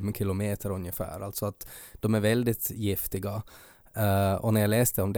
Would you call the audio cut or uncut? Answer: uncut